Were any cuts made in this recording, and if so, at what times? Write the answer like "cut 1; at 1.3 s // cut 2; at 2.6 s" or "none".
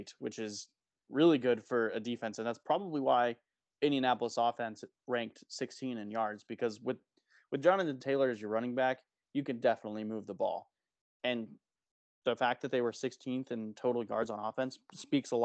none